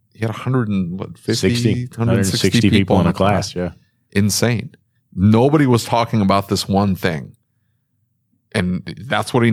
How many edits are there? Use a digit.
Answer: 1